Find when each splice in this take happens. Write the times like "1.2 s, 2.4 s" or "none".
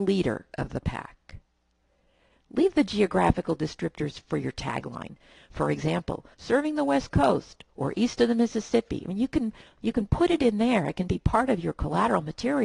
6.3 s